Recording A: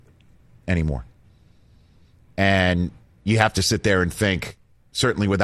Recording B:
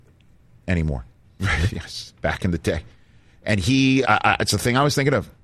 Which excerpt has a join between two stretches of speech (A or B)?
B